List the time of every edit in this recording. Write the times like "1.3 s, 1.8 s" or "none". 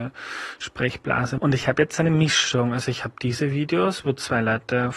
1.4 s